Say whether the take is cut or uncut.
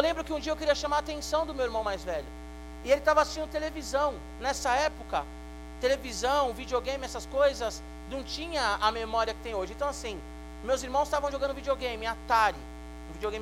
uncut